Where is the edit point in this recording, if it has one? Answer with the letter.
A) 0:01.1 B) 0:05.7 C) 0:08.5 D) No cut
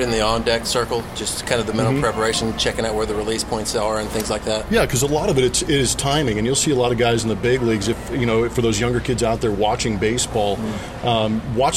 D